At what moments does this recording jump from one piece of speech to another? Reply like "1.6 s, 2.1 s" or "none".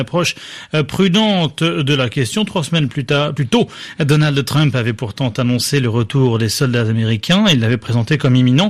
none